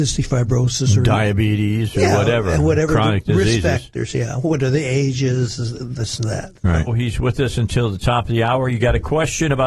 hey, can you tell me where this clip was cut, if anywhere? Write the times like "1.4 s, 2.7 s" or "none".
6.9 s